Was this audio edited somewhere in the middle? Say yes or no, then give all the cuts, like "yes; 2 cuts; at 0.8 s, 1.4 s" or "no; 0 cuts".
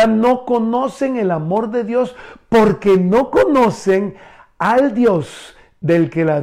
no; 0 cuts